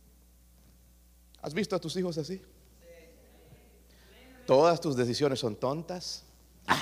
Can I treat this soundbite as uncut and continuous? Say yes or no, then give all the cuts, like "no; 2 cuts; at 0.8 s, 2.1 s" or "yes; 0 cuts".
yes; 0 cuts